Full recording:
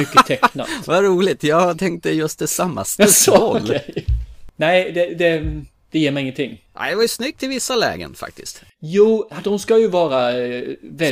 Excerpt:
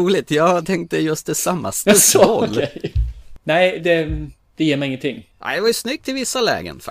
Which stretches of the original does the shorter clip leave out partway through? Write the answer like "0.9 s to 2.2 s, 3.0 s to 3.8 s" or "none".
4.9 s to 5.1 s